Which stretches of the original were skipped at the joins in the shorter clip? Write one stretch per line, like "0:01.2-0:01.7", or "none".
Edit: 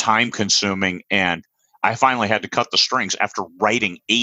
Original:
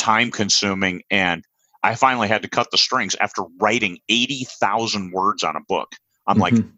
none